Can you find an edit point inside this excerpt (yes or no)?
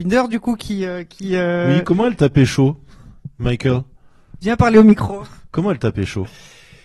no